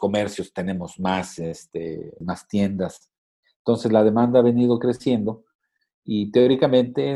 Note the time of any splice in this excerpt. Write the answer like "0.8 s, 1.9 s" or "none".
2.2 s